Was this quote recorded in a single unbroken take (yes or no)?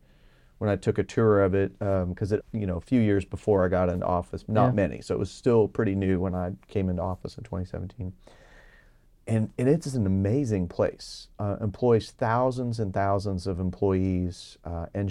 no